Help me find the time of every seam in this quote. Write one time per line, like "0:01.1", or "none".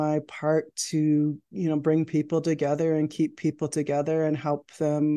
none